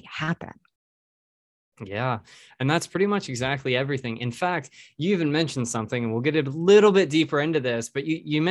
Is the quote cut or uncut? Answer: uncut